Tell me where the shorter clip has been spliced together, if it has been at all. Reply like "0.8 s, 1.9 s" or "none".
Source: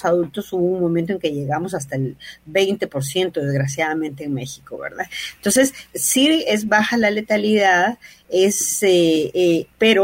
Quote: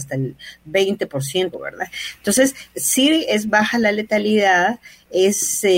1.5 s